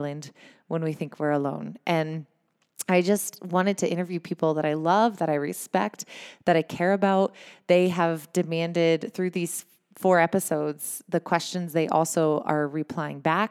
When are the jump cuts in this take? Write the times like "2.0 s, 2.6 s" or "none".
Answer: none